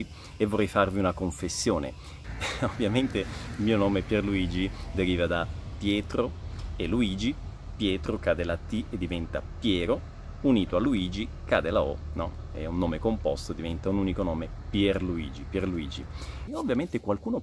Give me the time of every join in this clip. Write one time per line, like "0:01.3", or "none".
0:02.2
0:16.5